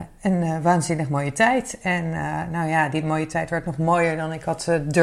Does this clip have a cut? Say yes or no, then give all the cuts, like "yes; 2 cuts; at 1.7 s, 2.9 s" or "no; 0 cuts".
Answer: no; 0 cuts